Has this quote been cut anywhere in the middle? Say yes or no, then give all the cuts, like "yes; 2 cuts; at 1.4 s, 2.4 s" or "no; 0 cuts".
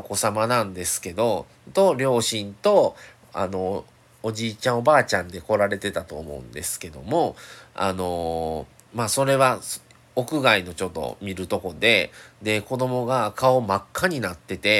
no; 0 cuts